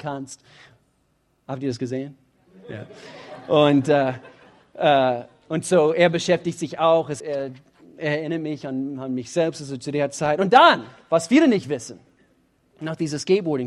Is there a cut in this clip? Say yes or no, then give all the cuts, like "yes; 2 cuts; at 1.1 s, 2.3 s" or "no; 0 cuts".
yes; 1 cut; at 7.2 s